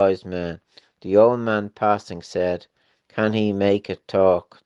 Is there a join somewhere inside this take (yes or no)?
no